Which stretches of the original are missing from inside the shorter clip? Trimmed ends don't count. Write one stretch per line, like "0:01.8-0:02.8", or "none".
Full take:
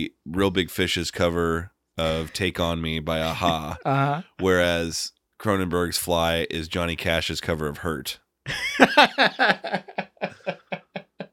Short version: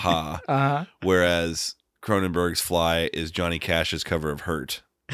none